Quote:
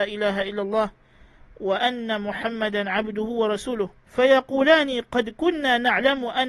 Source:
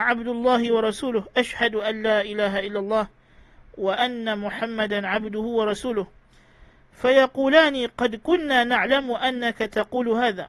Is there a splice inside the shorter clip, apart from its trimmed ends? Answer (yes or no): yes